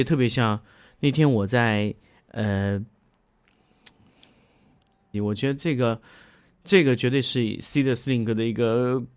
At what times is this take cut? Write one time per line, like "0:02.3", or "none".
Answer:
0:05.1